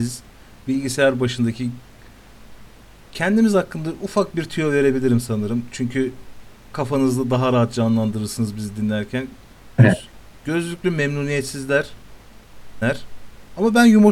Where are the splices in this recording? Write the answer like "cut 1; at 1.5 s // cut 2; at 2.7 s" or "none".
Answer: cut 1; at 9.8 s // cut 2; at 12.8 s